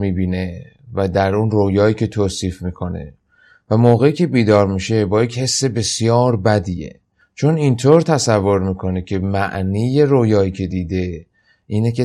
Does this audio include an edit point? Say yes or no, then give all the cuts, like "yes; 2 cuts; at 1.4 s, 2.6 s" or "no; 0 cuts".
no; 0 cuts